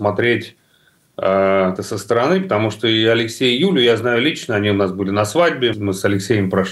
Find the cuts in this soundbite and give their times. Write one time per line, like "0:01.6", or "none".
0:01.8
0:05.7

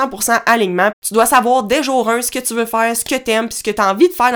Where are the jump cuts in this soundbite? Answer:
0:00.9

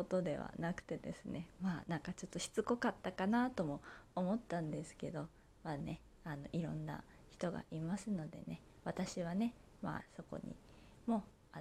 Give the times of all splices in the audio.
none

